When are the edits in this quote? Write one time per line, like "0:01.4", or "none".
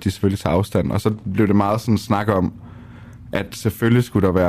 none